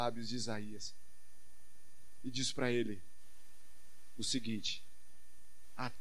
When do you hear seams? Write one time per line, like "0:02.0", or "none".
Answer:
none